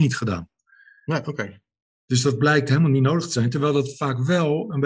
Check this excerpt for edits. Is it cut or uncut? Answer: uncut